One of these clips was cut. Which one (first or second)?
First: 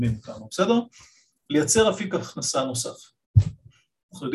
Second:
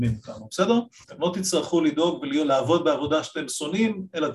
second